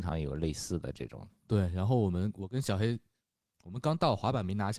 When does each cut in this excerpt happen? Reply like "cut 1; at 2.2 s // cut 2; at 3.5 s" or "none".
none